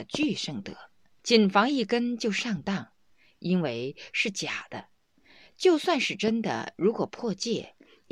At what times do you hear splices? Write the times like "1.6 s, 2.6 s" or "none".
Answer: 1.2 s